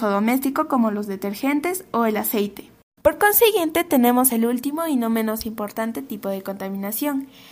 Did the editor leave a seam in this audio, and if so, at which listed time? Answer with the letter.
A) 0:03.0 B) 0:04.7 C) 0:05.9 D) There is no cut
A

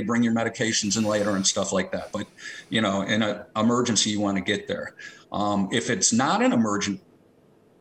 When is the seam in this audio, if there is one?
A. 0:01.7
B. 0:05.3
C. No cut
C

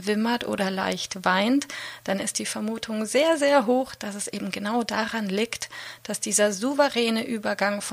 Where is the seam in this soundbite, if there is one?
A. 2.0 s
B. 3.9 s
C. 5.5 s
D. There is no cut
D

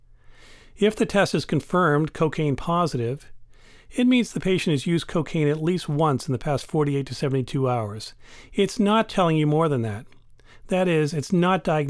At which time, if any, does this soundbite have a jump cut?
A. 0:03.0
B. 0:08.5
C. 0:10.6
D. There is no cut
D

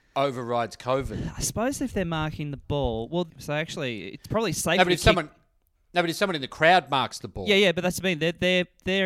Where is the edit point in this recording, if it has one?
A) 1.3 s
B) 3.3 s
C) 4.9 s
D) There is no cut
B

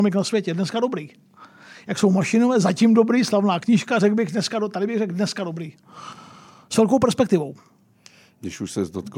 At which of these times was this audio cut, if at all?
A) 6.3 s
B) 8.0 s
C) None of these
C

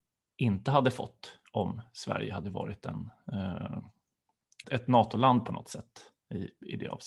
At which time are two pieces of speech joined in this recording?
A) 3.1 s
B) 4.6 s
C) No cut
B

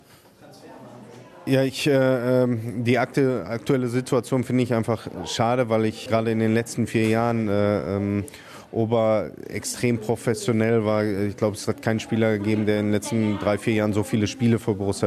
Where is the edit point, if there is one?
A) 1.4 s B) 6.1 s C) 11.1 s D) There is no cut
B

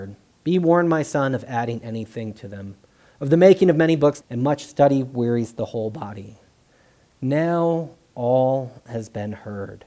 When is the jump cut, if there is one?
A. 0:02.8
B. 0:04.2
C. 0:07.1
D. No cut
B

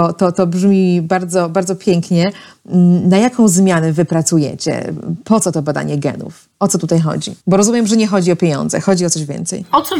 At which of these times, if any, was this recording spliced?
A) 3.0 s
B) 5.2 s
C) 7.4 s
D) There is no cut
C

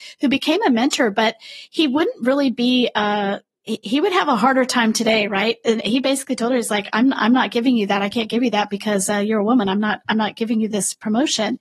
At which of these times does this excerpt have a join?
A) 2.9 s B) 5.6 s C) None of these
C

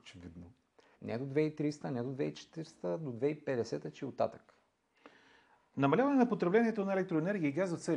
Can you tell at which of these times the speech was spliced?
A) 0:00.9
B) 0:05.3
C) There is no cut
A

